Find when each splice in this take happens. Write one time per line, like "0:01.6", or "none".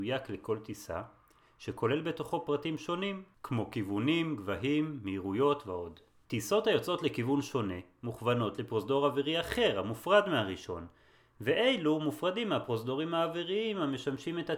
0:06.2